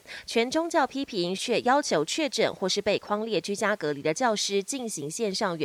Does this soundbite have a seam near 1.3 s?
yes; 1 cut; at 1.3 s

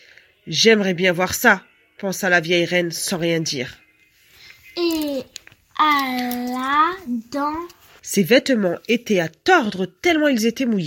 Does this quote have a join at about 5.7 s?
no; 1 cut; at 8.0 s

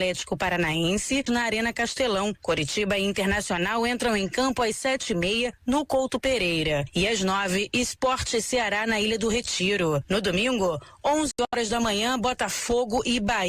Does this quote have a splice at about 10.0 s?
no; 1 cut; at 1.3 s

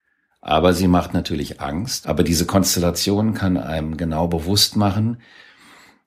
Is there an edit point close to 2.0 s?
yes; 1 cut; at 2.0 s

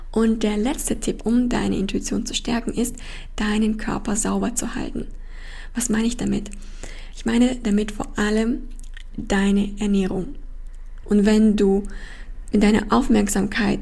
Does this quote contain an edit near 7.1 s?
no; 2 cuts; at 1.2 s, 11.0 s

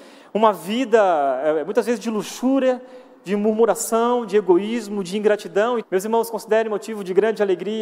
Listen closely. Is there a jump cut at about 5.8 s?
yes; 1 cut; at 5.8 s

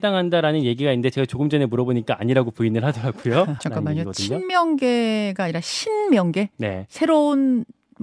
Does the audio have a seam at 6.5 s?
no; 1 cut; at 3.6 s

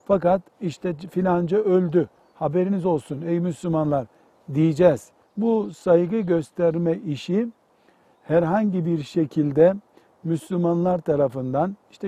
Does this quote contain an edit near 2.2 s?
no; 1 cut; at 5.2 s

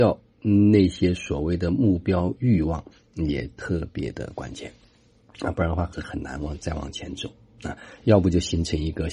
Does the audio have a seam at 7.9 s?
no; 1 cut; at 5.9 s

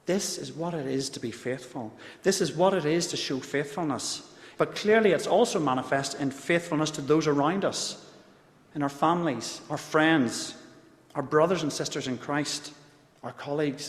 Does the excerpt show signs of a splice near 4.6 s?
yes; 1 cut; at 4.6 s

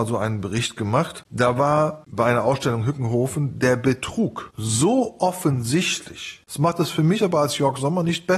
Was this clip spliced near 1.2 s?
no; 2 cuts; at 4.5 s, 6.4 s

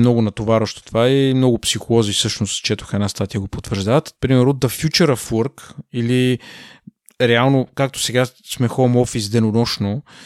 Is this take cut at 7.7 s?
no; 1 cut; at 4.2 s

